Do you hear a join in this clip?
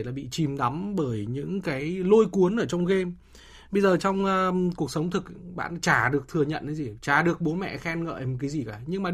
no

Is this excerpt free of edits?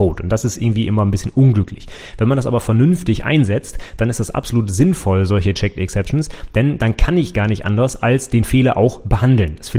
yes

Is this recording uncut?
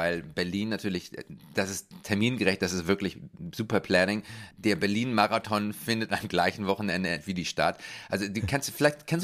yes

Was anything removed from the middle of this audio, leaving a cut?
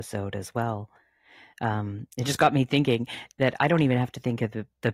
no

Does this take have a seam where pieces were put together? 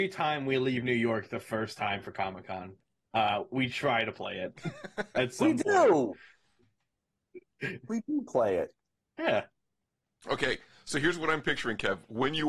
no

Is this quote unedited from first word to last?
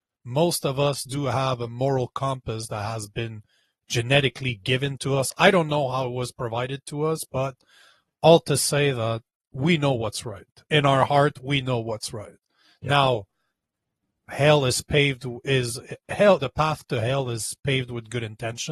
no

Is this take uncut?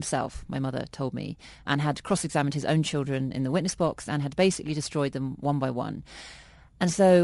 no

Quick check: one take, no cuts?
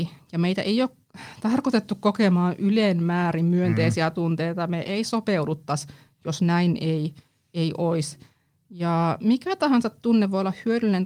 yes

